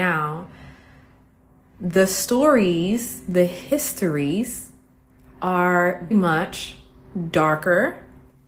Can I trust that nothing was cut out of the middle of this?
no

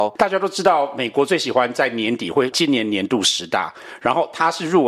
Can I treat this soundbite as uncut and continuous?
yes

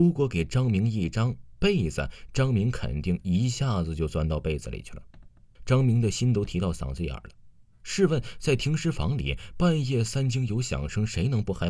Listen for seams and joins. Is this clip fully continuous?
no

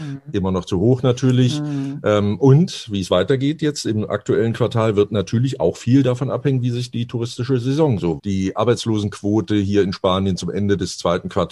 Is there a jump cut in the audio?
yes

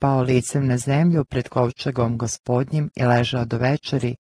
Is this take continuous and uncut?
yes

